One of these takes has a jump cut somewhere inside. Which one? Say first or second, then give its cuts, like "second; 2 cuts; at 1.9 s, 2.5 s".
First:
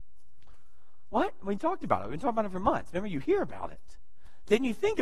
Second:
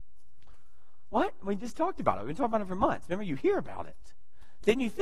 first; 1 cut; at 1.6 s